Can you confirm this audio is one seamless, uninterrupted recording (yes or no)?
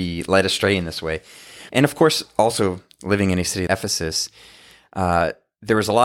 no